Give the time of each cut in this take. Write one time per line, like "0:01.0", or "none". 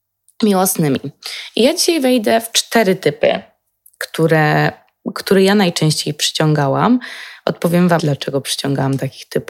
0:08.0